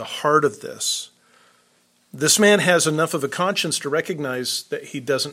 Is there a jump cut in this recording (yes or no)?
yes